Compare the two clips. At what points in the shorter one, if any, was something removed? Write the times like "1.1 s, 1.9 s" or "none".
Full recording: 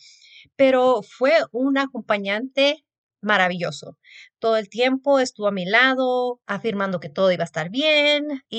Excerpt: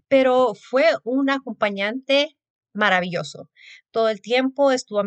none